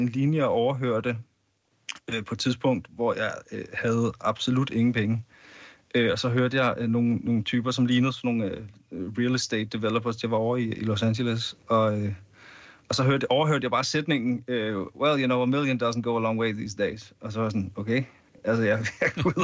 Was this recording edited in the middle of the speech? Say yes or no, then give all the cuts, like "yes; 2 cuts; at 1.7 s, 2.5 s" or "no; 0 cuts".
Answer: no; 0 cuts